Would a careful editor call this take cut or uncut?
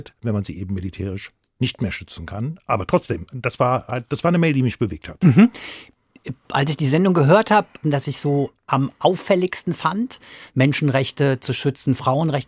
cut